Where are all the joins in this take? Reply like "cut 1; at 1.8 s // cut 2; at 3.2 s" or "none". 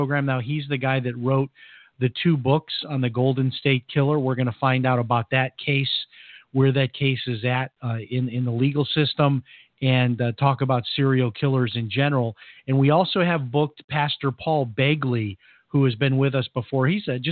none